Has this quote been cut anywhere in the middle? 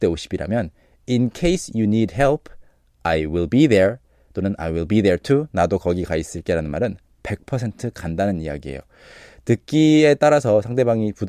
no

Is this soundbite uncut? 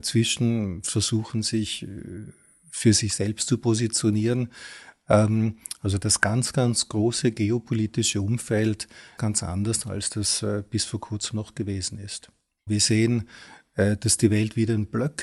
no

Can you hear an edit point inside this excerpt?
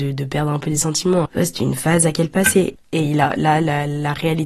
yes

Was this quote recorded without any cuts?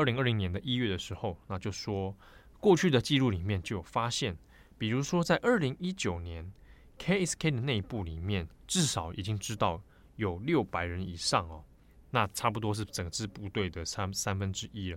yes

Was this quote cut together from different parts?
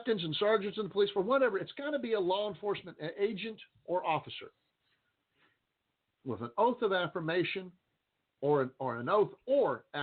no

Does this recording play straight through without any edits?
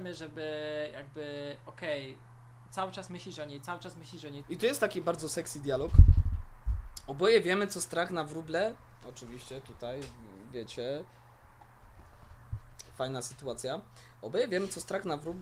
no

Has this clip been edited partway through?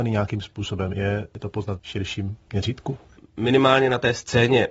no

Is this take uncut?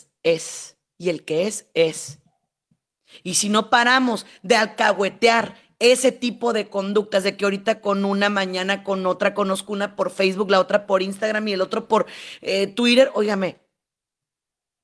yes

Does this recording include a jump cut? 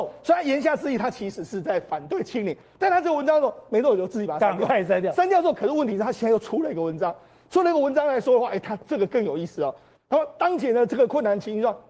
no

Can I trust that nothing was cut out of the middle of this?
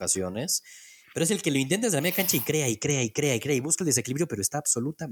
yes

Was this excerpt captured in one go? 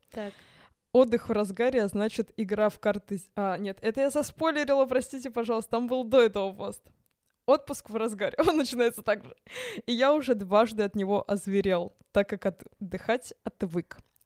yes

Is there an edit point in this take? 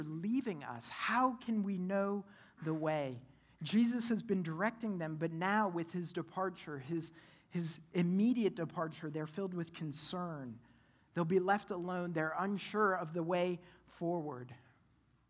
no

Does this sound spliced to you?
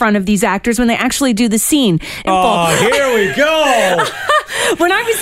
yes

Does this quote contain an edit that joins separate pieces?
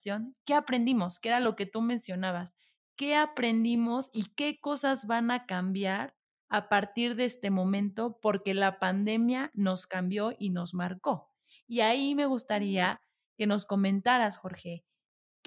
no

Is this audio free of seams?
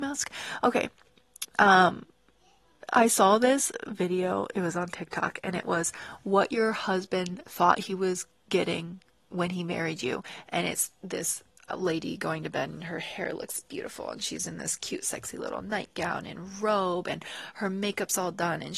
yes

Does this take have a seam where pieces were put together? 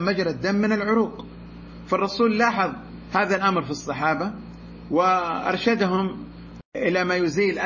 yes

